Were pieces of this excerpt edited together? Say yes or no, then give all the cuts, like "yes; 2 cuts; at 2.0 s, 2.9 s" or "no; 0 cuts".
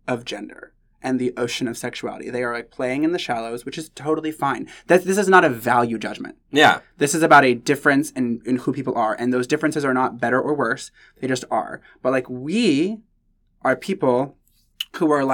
no; 0 cuts